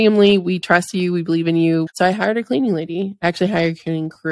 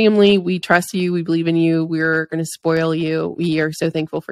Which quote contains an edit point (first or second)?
first